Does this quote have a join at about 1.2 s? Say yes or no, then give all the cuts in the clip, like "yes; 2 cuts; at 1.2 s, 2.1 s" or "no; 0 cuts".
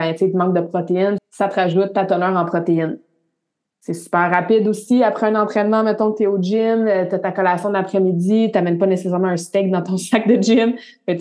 yes; 1 cut; at 1.2 s